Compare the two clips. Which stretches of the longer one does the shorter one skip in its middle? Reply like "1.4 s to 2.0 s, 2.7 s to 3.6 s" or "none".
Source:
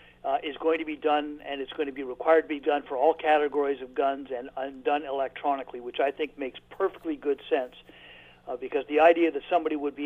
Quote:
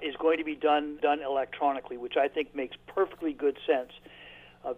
1.4 s to 4.8 s